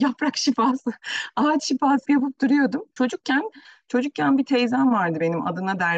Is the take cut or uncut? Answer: cut